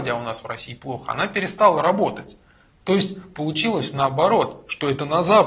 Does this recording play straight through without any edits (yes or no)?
yes